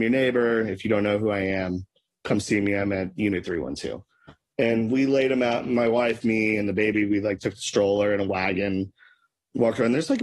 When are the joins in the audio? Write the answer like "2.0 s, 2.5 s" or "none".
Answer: none